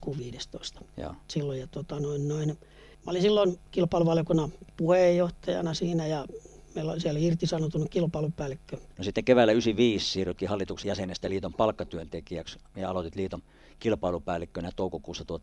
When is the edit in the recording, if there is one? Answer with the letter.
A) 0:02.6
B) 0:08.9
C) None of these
B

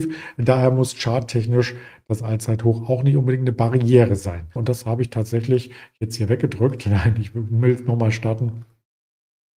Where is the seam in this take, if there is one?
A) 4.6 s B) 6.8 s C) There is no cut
A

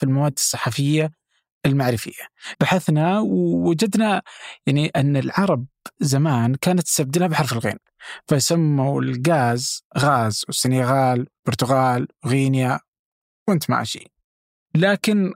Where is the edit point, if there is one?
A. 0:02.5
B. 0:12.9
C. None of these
A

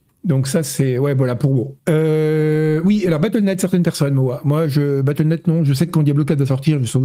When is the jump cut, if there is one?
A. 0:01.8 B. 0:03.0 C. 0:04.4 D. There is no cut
A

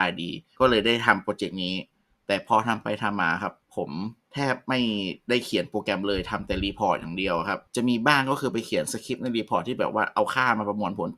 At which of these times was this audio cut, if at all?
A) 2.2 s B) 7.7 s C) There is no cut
B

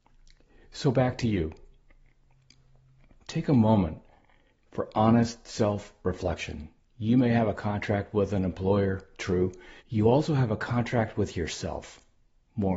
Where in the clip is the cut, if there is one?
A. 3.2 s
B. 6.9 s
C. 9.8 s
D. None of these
C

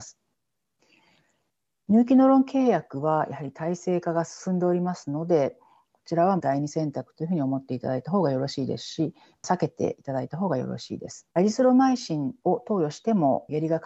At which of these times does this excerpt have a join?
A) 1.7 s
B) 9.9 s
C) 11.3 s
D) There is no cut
C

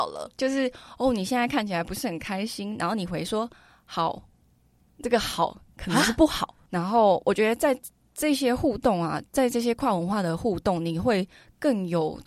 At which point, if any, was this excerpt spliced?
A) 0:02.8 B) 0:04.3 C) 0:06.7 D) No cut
C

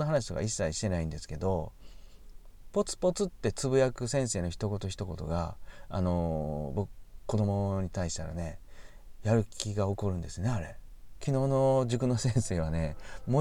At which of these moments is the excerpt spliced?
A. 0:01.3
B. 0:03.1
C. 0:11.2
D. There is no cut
C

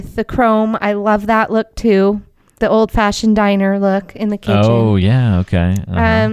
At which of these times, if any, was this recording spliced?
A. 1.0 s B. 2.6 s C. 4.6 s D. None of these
B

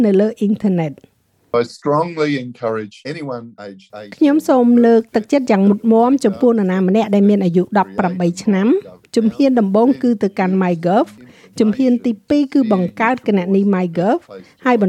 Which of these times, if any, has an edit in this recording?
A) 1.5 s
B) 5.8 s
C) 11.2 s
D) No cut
A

